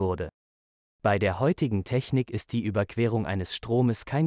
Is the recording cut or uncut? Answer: uncut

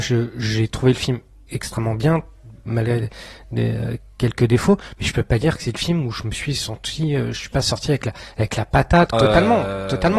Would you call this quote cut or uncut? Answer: cut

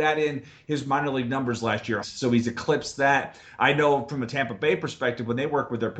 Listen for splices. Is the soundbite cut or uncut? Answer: cut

